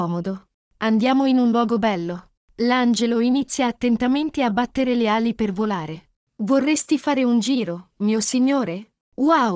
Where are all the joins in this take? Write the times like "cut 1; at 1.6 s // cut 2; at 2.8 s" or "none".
none